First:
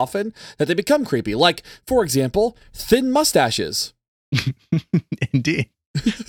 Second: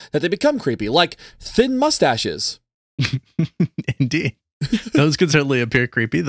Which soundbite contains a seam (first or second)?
second